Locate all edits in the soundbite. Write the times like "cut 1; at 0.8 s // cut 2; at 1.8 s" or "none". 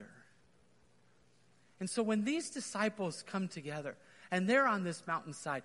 none